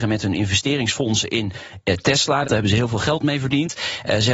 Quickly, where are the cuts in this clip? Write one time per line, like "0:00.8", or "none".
0:02.4